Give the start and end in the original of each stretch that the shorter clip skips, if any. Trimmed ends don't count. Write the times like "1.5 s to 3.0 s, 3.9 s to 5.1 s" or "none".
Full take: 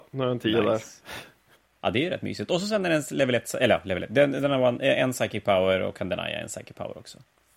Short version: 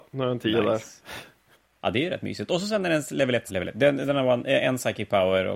3.5 s to 3.8 s